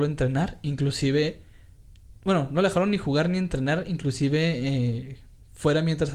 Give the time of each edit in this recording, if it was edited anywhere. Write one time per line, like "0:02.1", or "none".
none